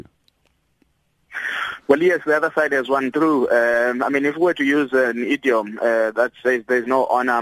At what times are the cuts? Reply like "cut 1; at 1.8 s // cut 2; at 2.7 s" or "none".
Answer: none